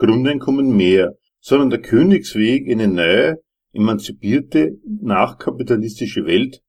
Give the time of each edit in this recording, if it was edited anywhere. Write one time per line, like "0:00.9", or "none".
0:01.3